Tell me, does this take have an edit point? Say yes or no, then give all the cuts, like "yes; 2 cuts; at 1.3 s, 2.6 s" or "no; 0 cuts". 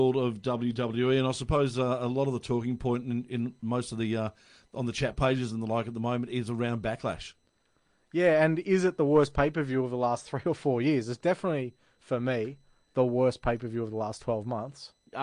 no; 0 cuts